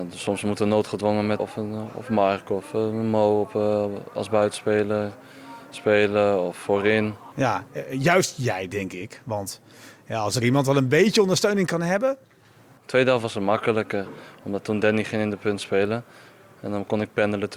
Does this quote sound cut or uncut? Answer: cut